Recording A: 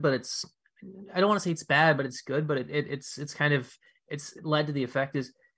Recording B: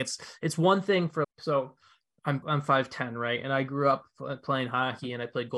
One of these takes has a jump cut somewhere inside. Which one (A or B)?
B